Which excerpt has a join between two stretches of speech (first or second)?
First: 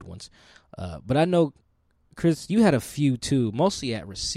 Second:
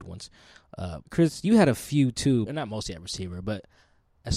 second